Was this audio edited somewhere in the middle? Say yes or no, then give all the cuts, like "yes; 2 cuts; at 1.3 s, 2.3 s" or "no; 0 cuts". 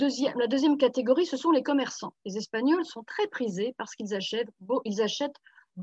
no; 0 cuts